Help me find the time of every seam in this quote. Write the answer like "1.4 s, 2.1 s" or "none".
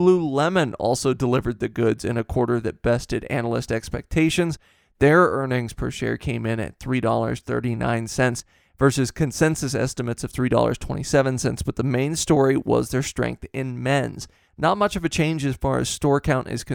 14.5 s